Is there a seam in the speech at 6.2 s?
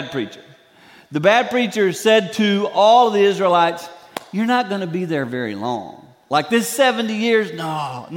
no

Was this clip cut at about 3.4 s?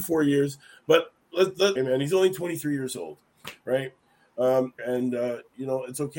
no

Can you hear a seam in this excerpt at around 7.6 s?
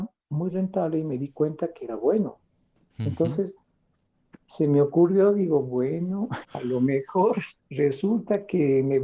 yes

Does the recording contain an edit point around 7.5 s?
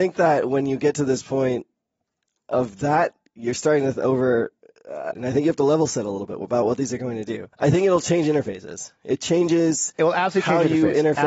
yes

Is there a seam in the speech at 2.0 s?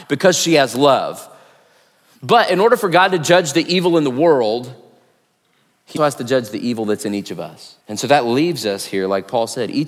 no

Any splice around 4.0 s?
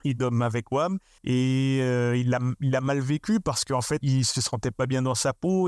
yes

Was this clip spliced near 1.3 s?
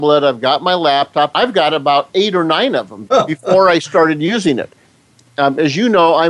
yes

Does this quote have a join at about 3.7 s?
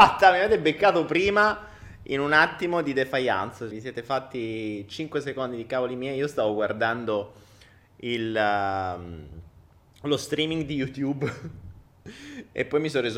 yes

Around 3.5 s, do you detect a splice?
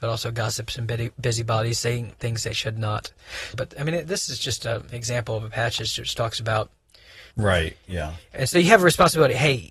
yes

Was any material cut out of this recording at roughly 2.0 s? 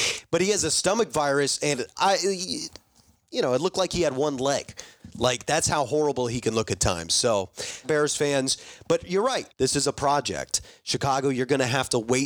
yes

